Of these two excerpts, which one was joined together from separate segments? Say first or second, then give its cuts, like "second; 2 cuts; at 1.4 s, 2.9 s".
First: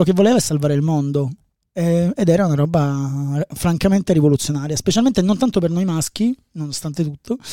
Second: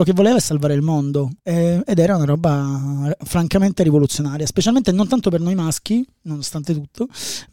second; 1 cut; at 1.4 s